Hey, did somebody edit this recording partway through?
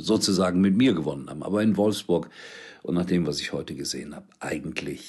no; 0 cuts

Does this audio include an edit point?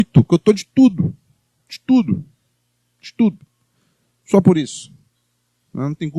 no; 0 cuts

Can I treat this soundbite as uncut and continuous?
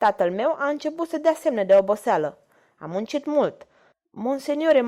no; 1 cut; at 3.9 s

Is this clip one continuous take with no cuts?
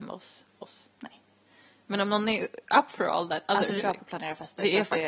no; 1 cut; at 3.8 s

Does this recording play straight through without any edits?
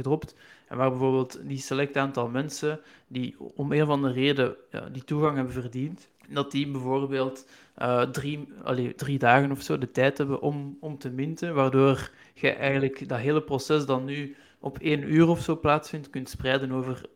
no; 1 cut; at 6.2 s

